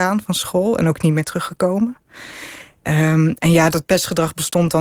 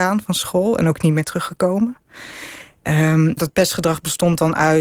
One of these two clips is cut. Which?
second; 1 cut; at 3.4 s

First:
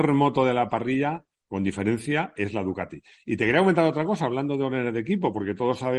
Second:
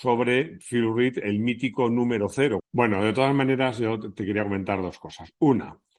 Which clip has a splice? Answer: second; 1 cut; at 2.6 s

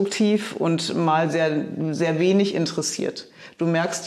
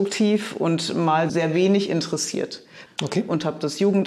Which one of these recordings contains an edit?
second; 2 cuts; at 1.3 s, 2.9 s

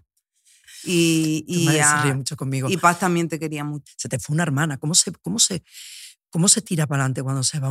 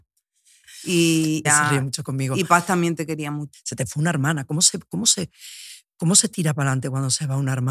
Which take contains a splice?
second; 1 cut; at 1.4 s

